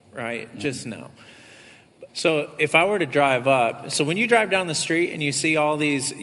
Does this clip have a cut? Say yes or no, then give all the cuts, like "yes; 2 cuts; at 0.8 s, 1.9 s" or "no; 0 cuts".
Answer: yes; 1 cut; at 2.1 s